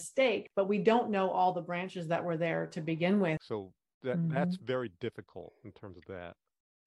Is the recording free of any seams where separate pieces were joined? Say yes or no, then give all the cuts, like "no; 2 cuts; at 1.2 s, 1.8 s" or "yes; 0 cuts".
no; 1 cut; at 3.4 s